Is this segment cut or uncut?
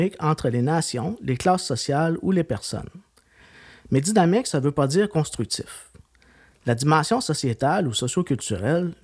uncut